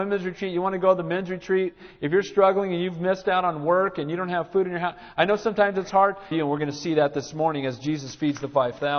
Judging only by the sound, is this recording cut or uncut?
cut